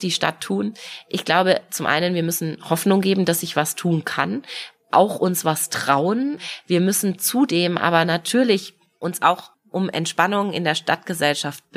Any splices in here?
no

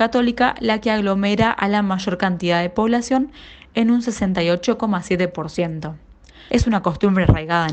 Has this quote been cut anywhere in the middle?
yes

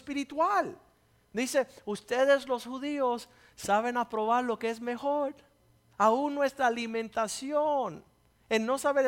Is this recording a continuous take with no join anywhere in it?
no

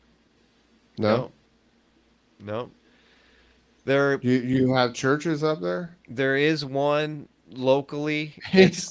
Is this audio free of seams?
yes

